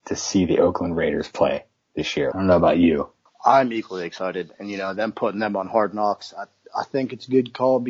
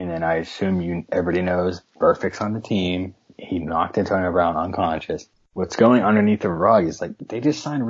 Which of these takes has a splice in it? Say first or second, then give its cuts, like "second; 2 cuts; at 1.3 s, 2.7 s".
first; 1 cut; at 2.3 s